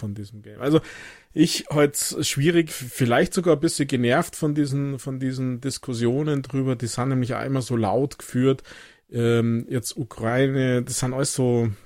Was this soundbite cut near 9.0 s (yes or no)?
no